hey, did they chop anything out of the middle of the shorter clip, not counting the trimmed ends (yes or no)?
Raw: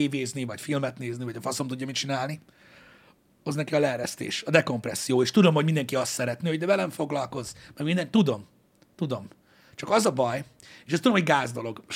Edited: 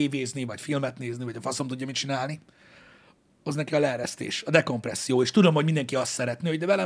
no